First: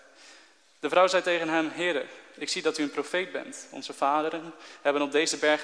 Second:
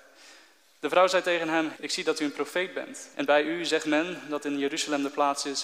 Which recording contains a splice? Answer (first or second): second